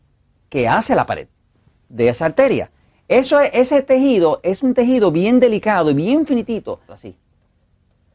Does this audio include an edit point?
yes; 1 cut; at 6.9 s

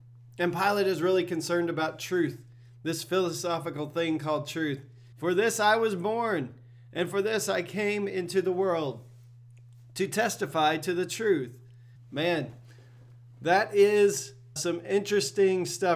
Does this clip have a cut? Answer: yes; 3 cuts; at 5.1 s, 12.0 s, 14.6 s

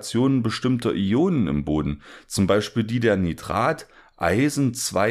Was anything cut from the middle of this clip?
no; 0 cuts

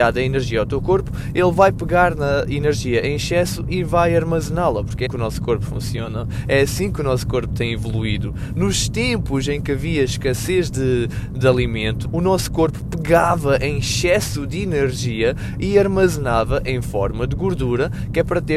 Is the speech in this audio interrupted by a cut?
yes; 2 cuts; at 5.1 s, 12.0 s

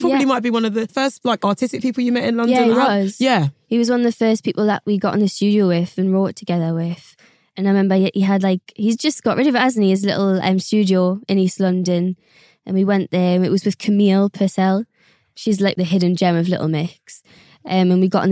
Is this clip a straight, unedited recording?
no; 1 cut; at 15.7 s

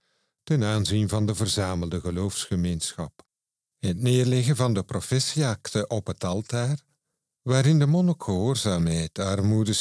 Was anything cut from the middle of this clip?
no; 0 cuts

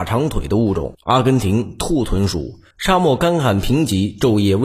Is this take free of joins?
no; 1 cut; at 2.7 s

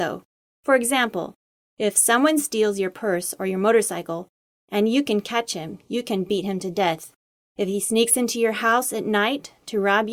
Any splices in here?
no; 0 cuts

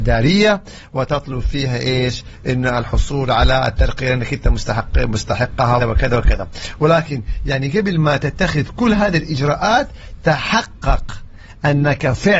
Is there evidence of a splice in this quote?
yes; 1 cut; at 5.8 s

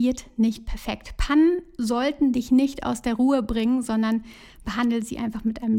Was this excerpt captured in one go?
yes; 0 cuts

